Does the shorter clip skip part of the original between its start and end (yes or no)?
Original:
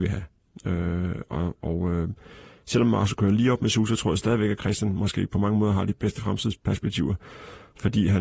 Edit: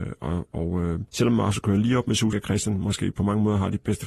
yes